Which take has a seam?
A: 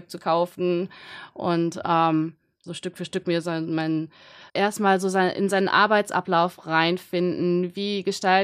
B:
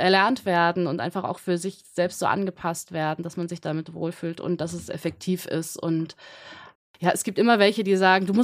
A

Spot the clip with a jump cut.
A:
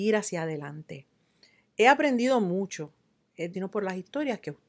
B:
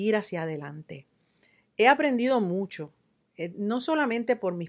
A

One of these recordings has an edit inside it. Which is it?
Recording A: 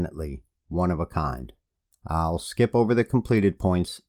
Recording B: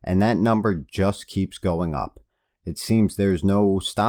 A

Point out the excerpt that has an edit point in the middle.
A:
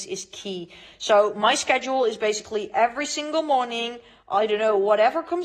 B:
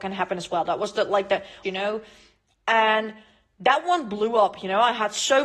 B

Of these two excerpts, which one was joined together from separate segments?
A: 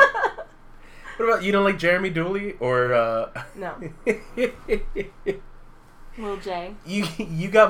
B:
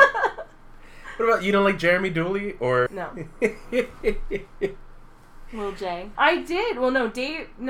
B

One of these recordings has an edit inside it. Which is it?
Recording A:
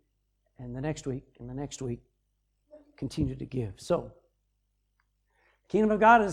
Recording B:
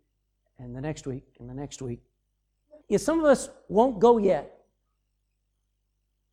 B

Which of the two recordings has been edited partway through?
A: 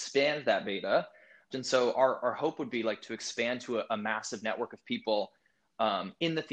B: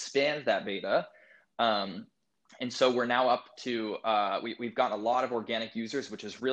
A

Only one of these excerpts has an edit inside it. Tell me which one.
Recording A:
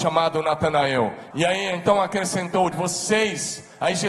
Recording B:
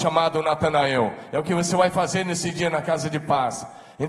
A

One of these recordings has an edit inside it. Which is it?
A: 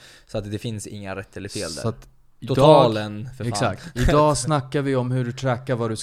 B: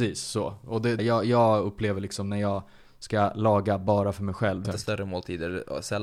B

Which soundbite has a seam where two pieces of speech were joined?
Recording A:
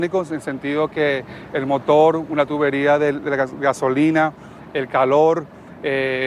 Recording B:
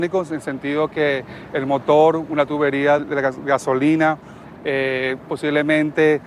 B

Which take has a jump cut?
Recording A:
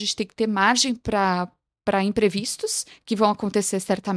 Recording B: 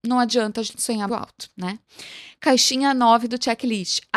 B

